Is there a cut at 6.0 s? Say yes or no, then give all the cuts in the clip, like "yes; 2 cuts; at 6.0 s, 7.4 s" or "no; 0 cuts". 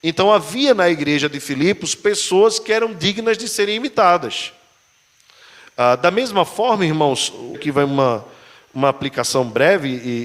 no; 1 cut; at 7.5 s